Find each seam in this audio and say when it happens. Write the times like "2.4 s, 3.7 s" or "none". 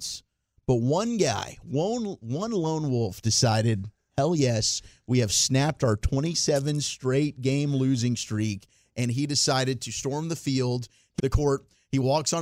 11.2 s